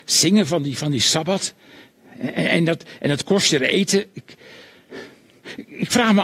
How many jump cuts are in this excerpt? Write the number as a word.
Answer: zero